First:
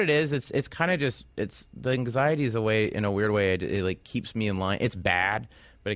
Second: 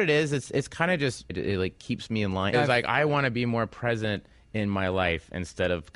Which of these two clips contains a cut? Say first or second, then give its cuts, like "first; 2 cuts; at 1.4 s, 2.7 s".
second; 2 cuts; at 1.3 s, 2.5 s